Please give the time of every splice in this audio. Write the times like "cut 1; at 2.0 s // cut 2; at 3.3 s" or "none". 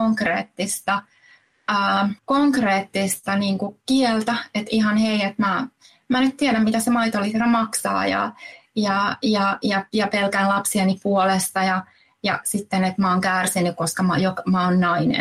cut 1; at 2.2 s